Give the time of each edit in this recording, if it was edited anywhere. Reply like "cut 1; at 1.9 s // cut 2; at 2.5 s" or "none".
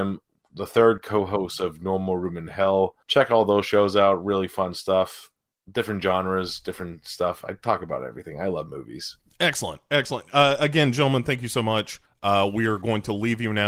none